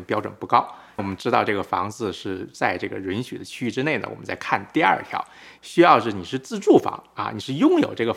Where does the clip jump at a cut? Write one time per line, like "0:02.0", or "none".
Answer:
0:01.0
0:05.6

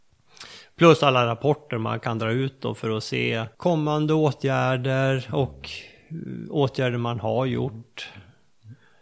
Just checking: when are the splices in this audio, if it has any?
0:03.5

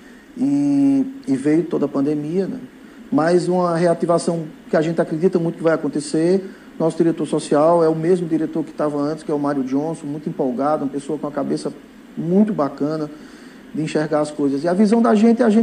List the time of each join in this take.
none

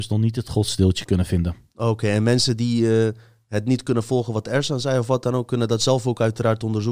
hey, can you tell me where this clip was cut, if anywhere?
none

